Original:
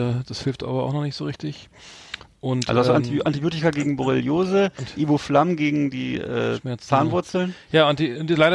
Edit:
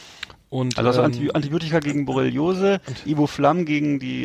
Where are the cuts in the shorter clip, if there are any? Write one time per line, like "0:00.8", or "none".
none